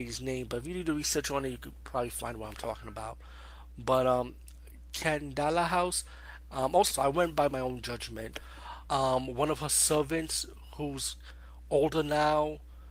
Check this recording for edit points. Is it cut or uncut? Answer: cut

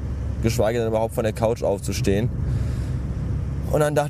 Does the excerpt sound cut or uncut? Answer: uncut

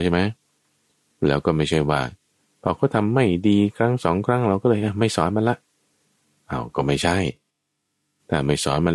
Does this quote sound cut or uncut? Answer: uncut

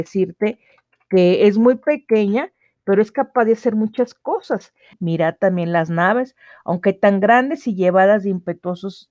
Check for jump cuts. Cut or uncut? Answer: cut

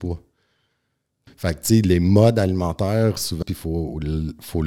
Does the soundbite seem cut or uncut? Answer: cut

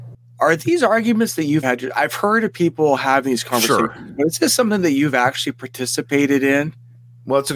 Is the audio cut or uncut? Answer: cut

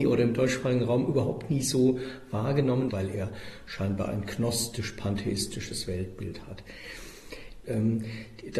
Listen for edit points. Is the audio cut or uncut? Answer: cut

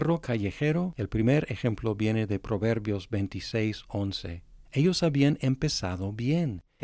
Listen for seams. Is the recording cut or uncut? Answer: cut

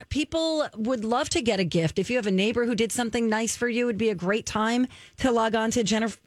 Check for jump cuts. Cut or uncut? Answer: uncut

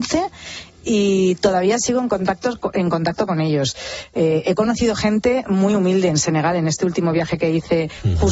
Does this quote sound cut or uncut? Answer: uncut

